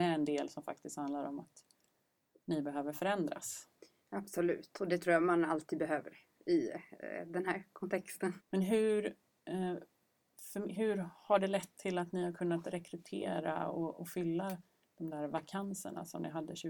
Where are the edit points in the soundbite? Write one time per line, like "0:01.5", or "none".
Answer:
0:08.4